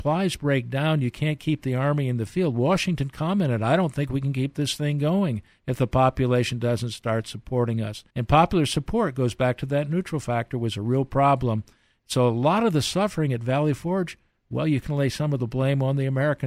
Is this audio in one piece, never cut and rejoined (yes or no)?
no